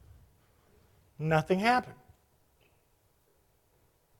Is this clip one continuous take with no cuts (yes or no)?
yes